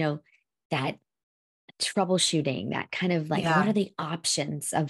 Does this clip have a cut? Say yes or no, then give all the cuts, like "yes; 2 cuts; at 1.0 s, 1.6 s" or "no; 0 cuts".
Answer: no; 0 cuts